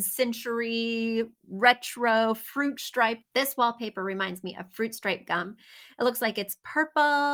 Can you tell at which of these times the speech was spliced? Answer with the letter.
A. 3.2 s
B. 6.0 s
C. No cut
A